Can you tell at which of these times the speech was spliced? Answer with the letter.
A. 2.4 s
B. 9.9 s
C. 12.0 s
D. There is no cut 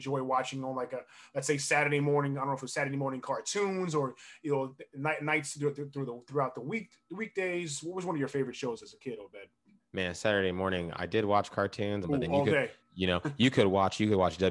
C